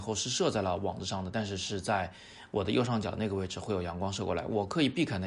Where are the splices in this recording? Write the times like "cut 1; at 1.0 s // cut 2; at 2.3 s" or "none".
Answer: none

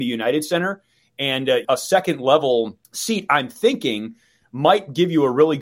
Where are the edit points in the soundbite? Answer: cut 1; at 1.6 s // cut 2; at 2.8 s

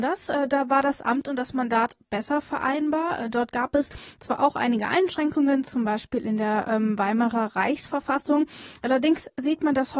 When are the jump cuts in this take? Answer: none

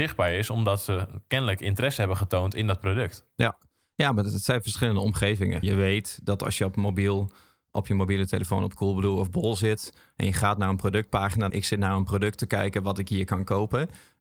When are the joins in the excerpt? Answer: cut 1; at 5.6 s // cut 2; at 11.5 s

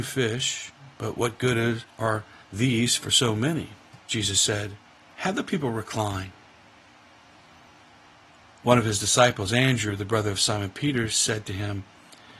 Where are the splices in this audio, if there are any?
cut 1; at 4.0 s // cut 2; at 8.5 s

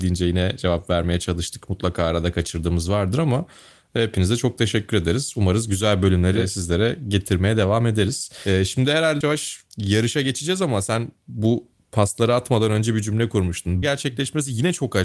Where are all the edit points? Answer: cut 1; at 9.2 s // cut 2; at 13.8 s

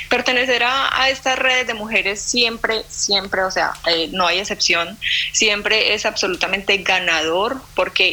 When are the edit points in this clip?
none

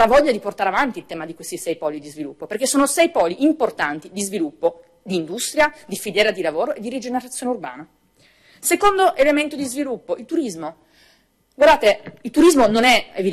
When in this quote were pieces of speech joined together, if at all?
none

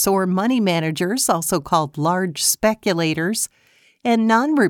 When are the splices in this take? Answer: none

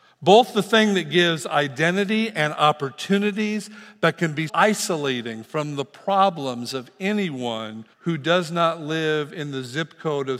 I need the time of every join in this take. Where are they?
cut 1; at 4.5 s // cut 2; at 7.9 s

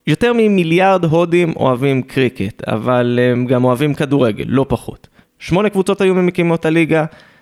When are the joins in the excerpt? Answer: cut 1; at 5.2 s

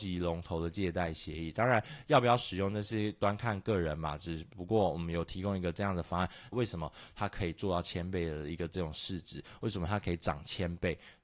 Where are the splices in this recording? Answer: cut 1; at 6.5 s

